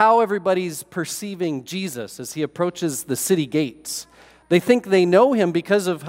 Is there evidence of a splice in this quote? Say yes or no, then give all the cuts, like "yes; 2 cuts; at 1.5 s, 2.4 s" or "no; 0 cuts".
no; 0 cuts